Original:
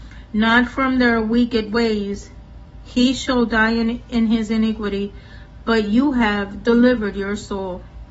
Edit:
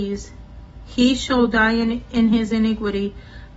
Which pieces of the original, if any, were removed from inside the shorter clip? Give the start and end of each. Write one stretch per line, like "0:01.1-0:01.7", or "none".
none

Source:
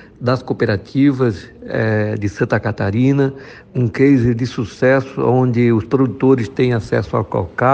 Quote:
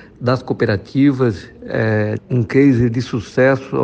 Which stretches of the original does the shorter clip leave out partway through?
0:02.2-0:03.6

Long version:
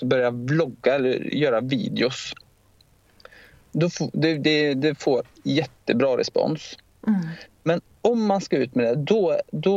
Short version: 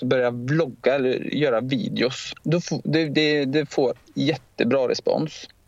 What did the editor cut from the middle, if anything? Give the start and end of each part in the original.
0:02.4-0:03.7

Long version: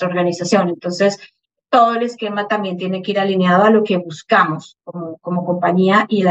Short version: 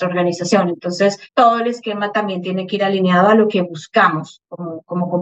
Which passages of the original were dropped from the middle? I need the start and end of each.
0:01.3-0:01.6

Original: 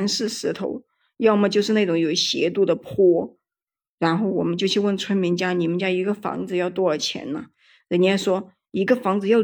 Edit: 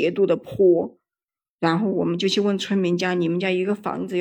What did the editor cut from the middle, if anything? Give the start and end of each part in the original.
none

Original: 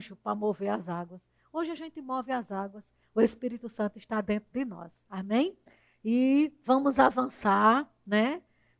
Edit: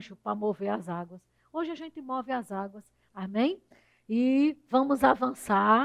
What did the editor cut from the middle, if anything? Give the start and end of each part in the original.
0:03.1-0:05.0

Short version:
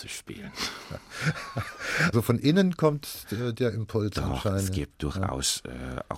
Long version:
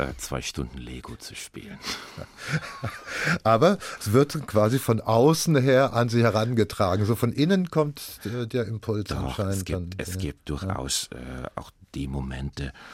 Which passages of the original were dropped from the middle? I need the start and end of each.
0:03.4-0:07.1
0:09.6-0:10.1

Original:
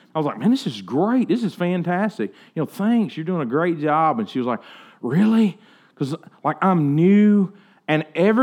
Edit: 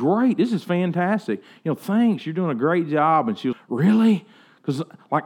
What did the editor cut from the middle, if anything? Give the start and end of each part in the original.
0:04.4-0:04.9

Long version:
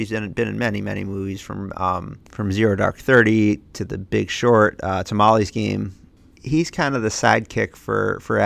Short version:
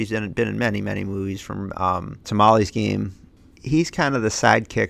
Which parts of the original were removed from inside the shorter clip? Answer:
0:02.2-0:05.0

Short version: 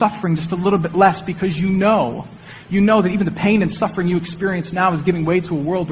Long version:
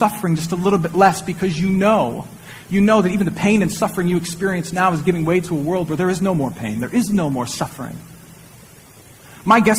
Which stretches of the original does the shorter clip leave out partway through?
none

